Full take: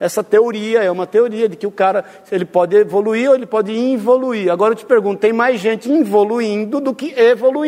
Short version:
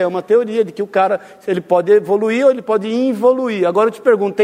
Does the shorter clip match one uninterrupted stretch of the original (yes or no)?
yes